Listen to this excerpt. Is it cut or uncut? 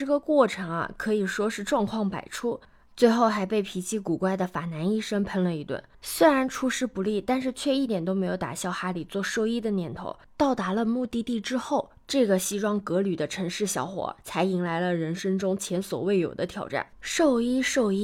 cut